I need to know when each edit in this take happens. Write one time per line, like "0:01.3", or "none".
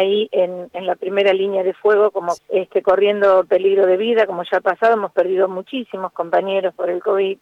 0:02.4